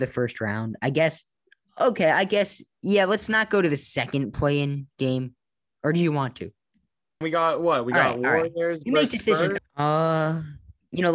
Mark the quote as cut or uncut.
cut